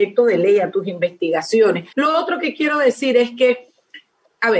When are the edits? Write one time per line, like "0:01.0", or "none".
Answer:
0:01.9